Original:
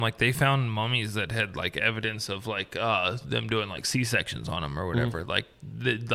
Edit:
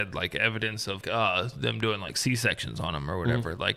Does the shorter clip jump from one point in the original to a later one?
yes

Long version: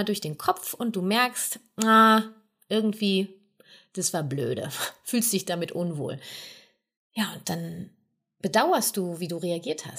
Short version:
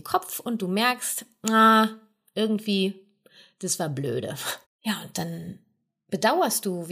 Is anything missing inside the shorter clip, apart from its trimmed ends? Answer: yes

